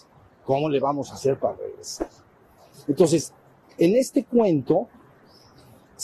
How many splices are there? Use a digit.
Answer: 1